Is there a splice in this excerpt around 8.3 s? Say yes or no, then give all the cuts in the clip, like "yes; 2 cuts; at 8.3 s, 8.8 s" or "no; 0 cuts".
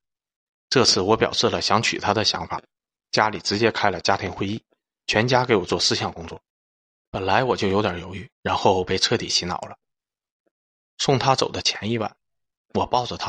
yes; 1 cut; at 8.3 s